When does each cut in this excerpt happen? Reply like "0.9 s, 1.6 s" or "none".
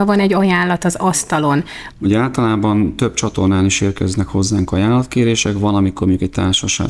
1.9 s